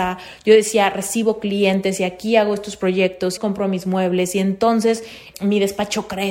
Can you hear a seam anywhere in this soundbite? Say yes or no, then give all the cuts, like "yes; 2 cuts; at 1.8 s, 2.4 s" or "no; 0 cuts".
yes; 2 cuts; at 3.4 s, 5.3 s